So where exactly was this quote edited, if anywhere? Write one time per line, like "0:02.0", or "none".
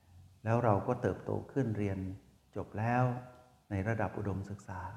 none